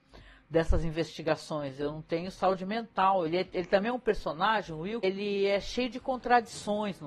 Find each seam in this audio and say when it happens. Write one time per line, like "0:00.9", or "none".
0:03.3
0:05.0